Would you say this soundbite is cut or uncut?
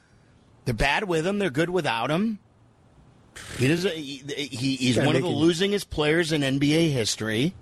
uncut